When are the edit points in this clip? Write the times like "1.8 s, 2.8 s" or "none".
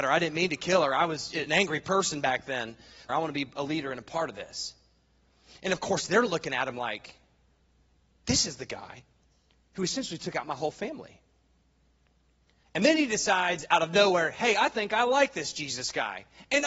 3.1 s, 12.6 s